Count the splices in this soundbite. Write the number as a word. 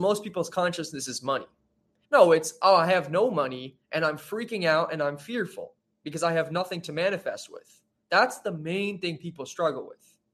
one